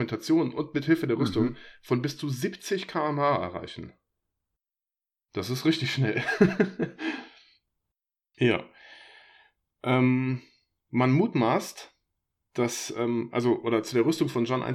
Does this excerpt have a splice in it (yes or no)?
no